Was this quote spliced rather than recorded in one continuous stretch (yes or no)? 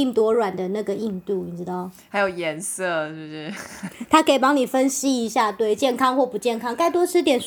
no